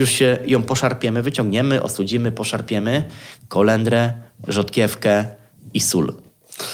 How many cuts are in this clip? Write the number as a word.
one